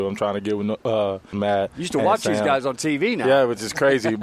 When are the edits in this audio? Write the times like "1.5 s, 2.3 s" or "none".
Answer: 1.3 s

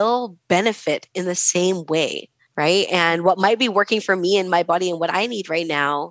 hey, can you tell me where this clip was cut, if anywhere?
none

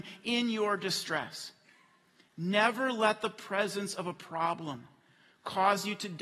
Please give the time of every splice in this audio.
none

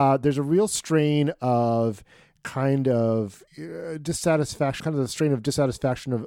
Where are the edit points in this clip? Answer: 3.5 s, 4.8 s

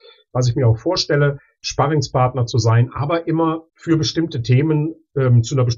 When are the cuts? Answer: 3.7 s

